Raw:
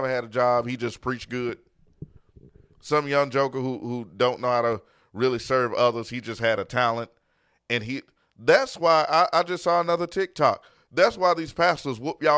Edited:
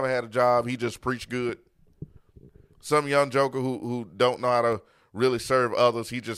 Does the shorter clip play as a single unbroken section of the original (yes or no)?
yes